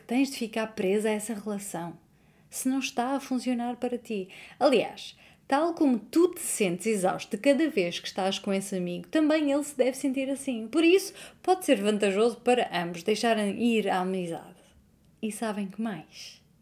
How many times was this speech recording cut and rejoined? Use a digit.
1